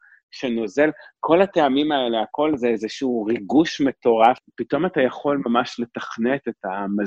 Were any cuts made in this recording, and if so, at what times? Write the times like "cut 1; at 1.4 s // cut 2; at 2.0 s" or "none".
none